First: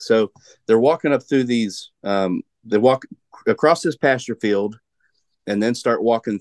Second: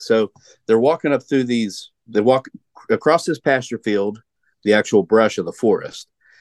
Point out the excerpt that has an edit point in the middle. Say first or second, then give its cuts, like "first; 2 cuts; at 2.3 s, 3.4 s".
second; 2 cuts; at 2.0 s, 4.5 s